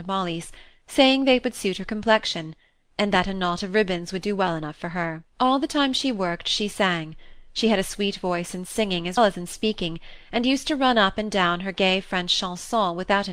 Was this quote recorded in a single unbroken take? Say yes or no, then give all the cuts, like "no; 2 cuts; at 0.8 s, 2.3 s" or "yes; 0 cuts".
no; 2 cuts; at 5.3 s, 9.2 s